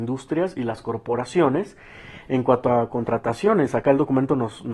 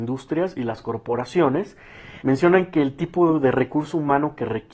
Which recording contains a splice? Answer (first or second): second